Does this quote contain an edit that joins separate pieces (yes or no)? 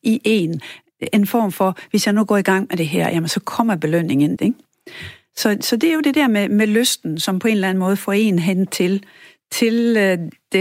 yes